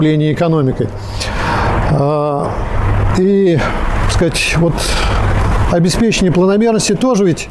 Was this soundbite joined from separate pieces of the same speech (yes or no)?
no